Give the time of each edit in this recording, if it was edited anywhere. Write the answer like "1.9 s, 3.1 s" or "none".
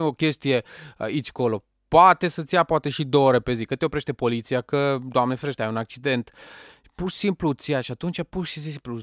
none

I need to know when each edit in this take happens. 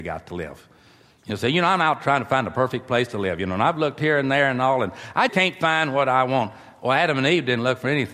5.3 s

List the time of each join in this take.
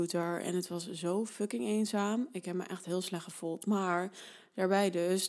none

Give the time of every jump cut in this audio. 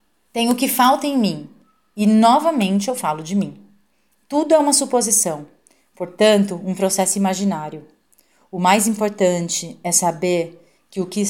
none

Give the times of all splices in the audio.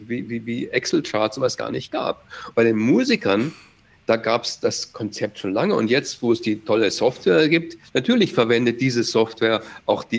2.5 s

